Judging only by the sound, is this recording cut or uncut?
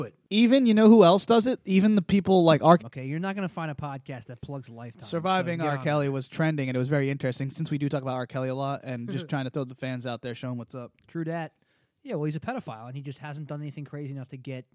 cut